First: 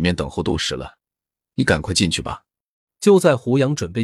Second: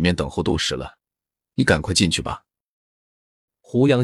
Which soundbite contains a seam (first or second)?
first